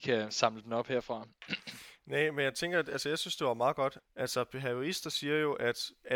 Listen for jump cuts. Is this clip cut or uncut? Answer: cut